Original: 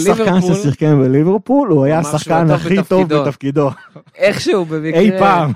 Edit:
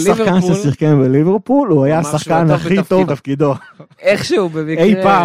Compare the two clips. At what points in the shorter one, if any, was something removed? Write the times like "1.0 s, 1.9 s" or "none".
3.1 s